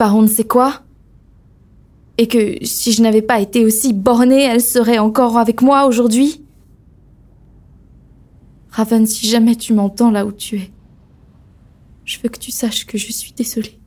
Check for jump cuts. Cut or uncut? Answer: uncut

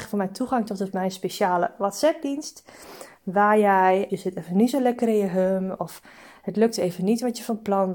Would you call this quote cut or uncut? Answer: cut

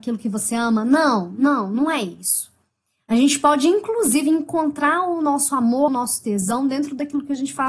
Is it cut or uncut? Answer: cut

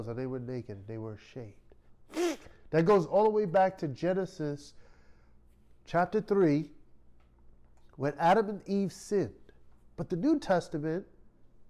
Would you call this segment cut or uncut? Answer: cut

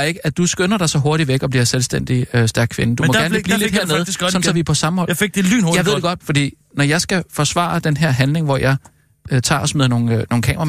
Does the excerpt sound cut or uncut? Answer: cut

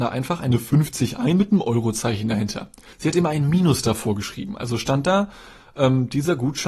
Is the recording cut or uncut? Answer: cut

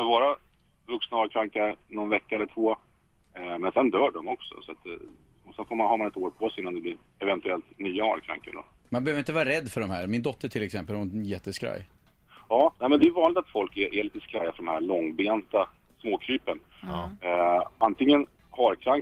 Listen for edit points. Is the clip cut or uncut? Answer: uncut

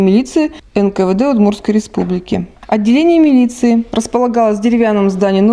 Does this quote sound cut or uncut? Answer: cut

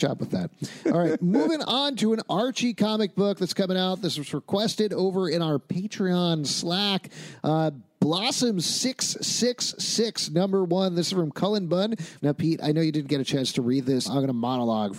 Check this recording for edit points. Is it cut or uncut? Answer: cut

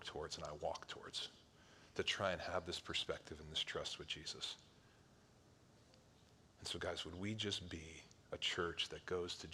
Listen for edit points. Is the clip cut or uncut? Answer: uncut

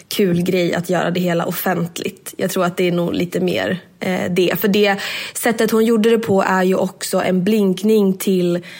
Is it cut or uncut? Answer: uncut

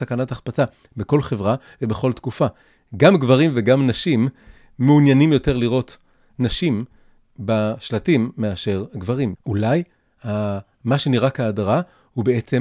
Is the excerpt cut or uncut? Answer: cut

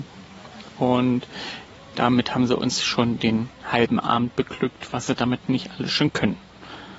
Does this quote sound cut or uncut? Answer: uncut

